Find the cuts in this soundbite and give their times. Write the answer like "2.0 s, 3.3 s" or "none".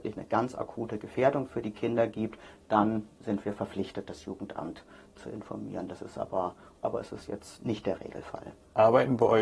6.8 s